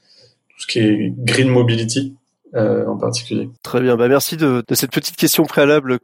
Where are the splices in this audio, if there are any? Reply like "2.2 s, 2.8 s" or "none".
3.6 s, 4.6 s